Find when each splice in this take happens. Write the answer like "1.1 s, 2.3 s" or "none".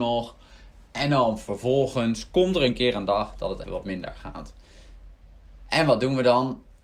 3.6 s

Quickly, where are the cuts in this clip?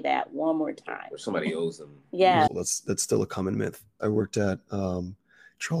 2.5 s, 4.0 s

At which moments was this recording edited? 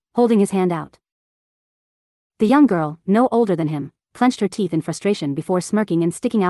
none

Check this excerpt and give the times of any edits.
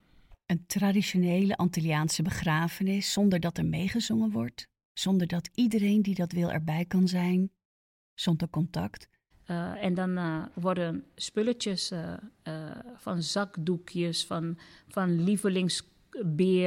9.3 s

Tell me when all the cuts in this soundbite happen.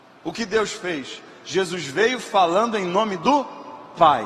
none

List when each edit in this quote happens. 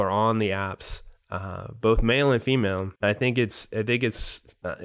3.0 s

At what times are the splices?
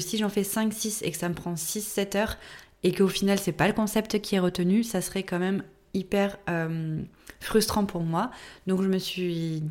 none

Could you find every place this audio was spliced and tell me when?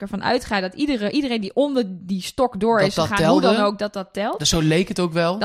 none

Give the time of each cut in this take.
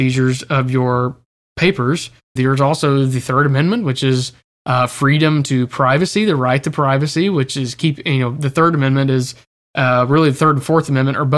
2.4 s

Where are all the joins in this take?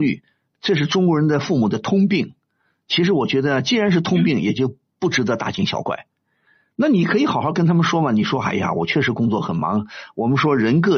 none

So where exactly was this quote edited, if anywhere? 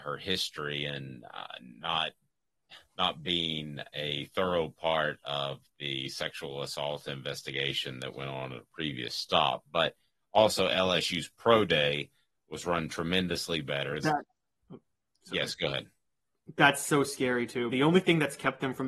2.9 s, 14.0 s, 17.7 s

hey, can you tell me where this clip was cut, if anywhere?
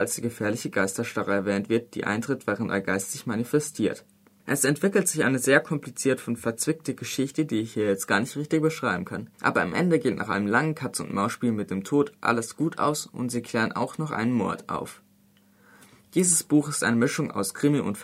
4.4 s, 9.3 s

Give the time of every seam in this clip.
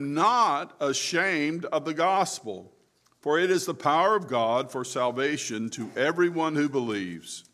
none

